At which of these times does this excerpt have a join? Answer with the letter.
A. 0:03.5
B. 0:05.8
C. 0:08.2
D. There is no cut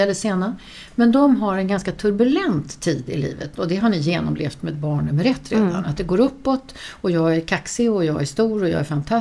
D